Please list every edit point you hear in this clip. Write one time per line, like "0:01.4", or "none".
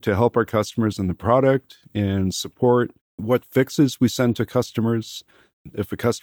none